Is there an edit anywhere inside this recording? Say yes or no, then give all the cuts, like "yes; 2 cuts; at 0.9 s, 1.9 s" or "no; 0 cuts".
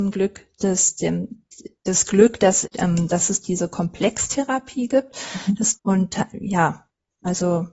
yes; 2 cuts; at 2.6 s, 5.7 s